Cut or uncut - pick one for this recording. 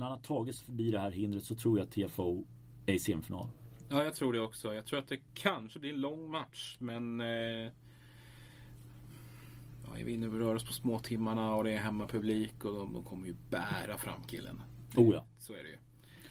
cut